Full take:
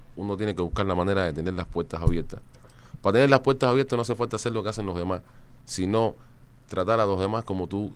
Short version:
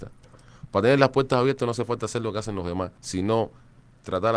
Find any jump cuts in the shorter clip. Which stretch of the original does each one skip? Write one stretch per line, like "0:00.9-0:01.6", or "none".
0:05.3-0:05.6